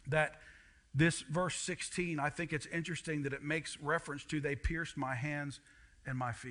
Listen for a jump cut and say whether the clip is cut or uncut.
uncut